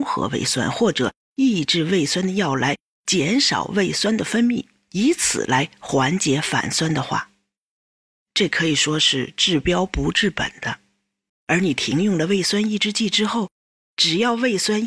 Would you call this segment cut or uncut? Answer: cut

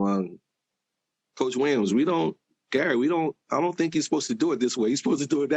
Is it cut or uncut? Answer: uncut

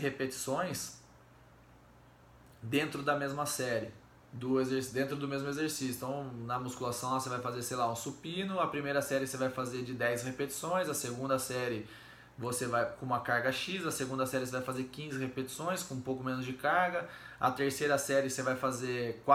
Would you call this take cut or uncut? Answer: uncut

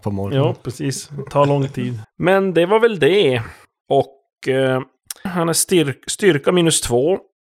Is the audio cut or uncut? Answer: cut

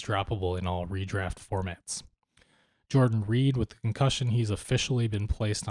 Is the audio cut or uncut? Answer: uncut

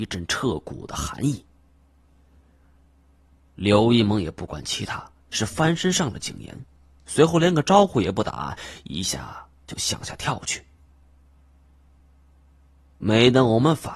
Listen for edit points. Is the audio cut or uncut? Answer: uncut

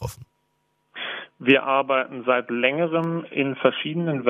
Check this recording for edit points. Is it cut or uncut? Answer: uncut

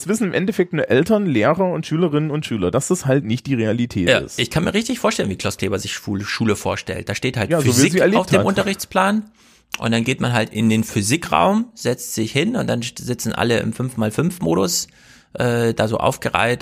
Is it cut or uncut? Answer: uncut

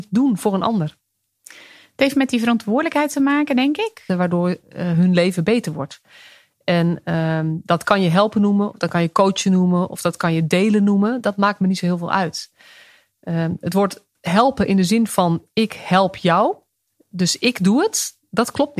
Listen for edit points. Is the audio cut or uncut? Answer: cut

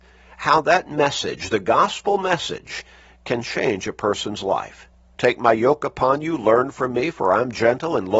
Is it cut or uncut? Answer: cut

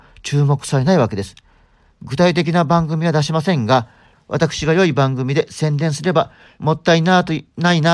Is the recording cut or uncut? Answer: cut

